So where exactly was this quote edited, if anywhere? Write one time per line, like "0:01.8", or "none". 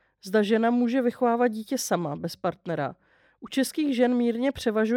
none